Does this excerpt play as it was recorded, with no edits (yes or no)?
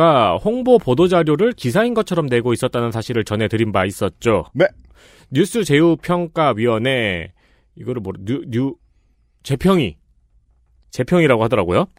yes